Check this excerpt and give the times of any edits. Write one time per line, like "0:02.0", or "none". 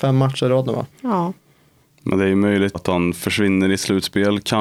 0:00.9
0:02.7